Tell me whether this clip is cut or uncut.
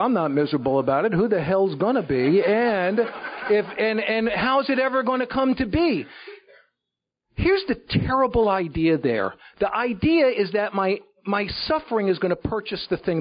uncut